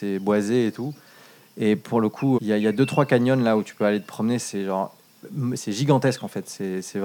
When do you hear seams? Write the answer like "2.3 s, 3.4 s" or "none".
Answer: 2.4 s, 5.6 s